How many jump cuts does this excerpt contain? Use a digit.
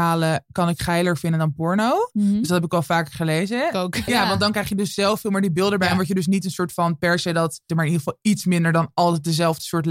2